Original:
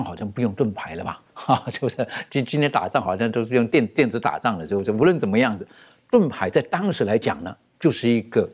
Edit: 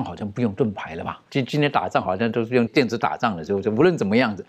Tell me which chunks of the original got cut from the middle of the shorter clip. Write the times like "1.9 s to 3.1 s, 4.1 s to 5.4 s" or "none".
1.3 s to 2.3 s, 3.7 s to 3.9 s

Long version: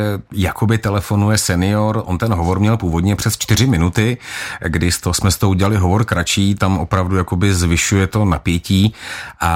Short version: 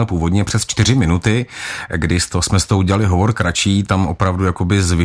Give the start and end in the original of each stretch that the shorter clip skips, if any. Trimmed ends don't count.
none

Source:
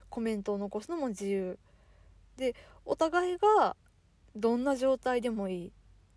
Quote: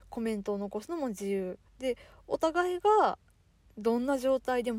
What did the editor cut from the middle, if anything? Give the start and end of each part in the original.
1.7 s to 2.3 s

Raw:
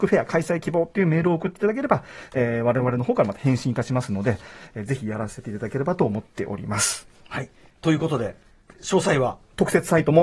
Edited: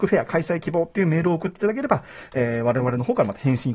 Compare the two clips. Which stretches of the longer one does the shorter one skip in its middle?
none

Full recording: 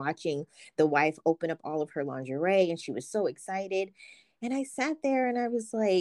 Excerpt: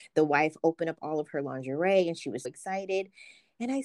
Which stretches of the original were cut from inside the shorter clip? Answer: 3.1 s to 3.3 s

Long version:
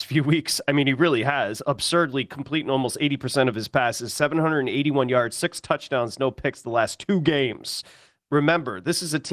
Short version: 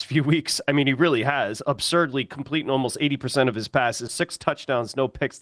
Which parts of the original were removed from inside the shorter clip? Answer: 4.1 s to 5.3 s

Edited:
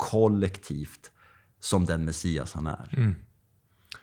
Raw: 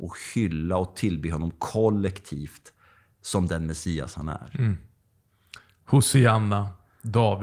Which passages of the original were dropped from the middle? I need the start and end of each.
none

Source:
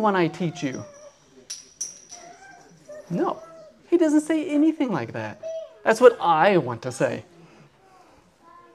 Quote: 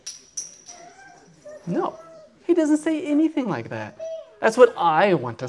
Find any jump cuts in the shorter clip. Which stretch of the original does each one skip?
none

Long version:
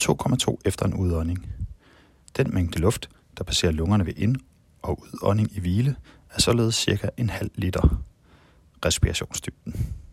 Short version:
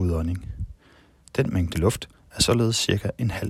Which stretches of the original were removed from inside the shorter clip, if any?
3.2 s to 6.2 s

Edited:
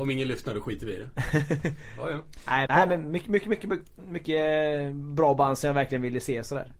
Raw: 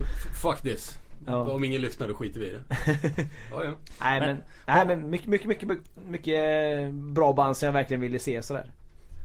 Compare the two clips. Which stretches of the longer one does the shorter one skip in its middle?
4.2 s to 4.6 s

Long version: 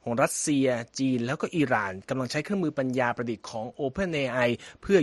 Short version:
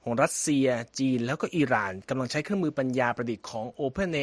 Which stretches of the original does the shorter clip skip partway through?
none

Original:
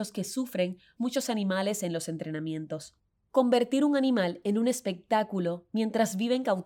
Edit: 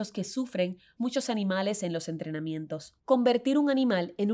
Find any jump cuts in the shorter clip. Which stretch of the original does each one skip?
3.0 s to 3.3 s

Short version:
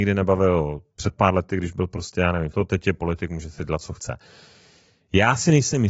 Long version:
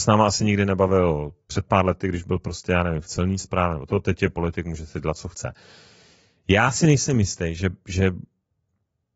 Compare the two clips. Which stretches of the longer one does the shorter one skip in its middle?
3.0 s to 3.9 s

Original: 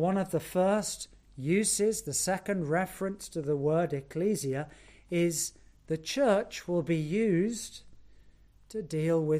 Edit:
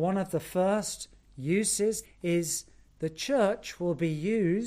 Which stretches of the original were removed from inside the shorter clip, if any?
2.0 s to 4.9 s

